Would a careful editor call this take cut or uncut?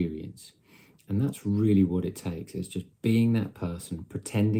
uncut